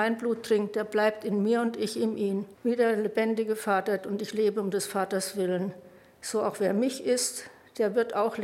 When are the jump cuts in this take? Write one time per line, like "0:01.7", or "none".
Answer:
0:02.5
0:04.0